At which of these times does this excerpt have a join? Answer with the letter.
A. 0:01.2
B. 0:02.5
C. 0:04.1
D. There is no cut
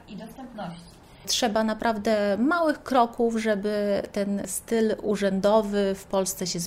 A